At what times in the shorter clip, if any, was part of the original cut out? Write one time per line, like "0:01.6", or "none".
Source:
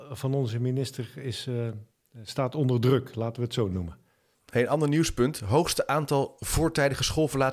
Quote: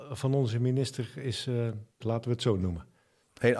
0:02.0